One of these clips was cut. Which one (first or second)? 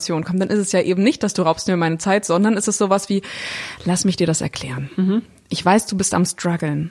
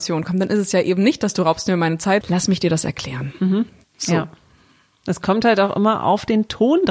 second